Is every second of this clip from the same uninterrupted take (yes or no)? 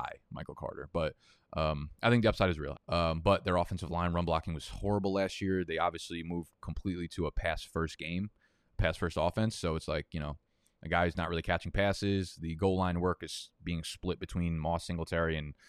no